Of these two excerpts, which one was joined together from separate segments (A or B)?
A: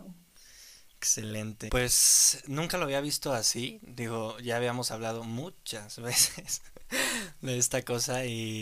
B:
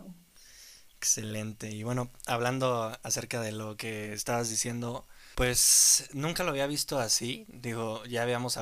A